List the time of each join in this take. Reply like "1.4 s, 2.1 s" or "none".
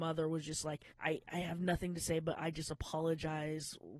0.9 s